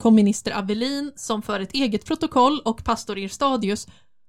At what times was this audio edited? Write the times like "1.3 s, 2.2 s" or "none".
none